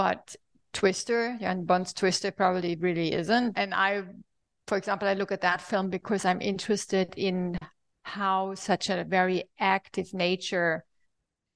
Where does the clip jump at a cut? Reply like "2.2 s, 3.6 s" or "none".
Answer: 3.5 s